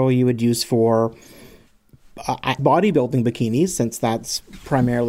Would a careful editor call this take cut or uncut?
cut